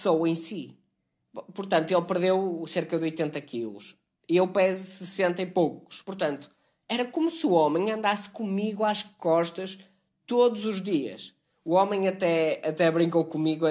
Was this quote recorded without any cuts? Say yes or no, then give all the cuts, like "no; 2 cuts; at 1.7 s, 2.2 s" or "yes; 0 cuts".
yes; 0 cuts